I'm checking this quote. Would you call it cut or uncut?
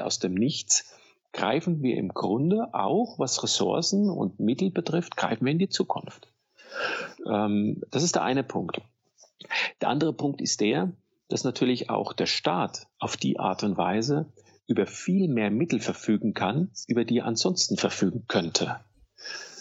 uncut